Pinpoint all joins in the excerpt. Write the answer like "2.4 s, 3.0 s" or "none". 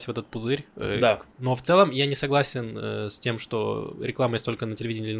1.3 s

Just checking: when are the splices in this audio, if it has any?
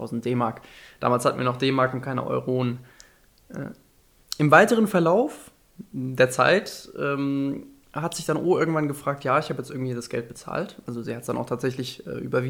none

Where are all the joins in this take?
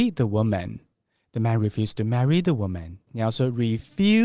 3.1 s

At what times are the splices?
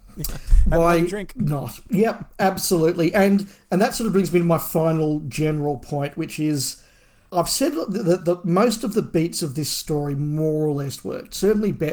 8.2 s

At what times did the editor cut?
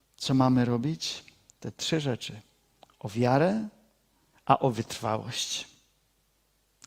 1.5 s, 4.3 s

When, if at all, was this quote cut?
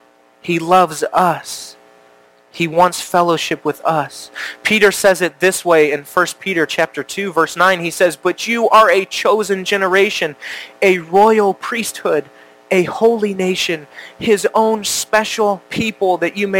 none

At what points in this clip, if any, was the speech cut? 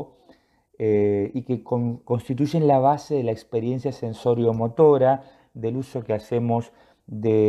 2.0 s

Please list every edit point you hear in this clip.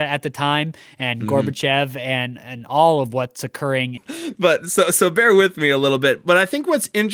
4.0 s

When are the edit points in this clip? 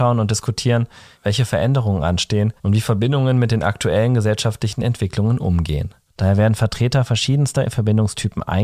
1.1 s, 2.6 s, 6.1 s

